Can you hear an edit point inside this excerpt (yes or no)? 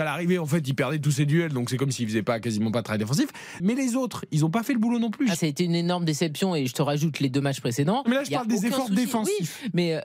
yes